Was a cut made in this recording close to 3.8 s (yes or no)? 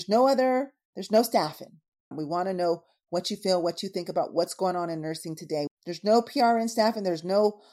no